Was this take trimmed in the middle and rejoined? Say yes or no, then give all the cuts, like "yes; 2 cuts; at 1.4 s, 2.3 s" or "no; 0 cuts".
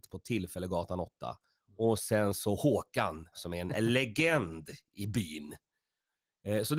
yes; 2 cuts; at 1.6 s, 3.3 s